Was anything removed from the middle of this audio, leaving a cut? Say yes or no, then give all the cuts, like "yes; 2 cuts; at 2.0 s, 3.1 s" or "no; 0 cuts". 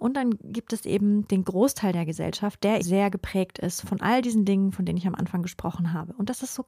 yes; 2 cuts; at 2.8 s, 3.8 s